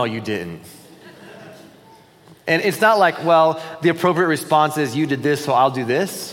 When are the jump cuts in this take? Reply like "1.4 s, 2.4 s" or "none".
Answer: none